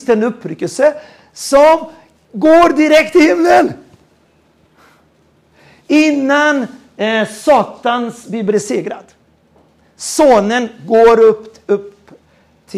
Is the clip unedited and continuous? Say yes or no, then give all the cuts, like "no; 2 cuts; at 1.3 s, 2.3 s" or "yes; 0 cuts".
yes; 0 cuts